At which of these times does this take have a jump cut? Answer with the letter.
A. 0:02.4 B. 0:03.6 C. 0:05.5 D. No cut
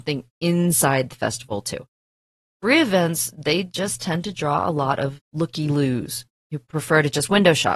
D